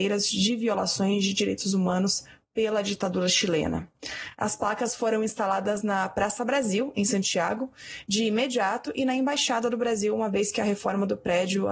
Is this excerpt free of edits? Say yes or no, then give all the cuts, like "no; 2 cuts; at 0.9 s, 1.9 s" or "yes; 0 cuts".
yes; 0 cuts